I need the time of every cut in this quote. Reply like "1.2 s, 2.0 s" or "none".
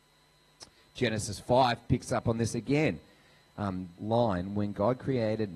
3.9 s